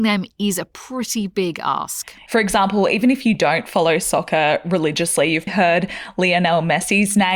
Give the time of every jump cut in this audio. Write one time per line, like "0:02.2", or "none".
0:02.3
0:05.5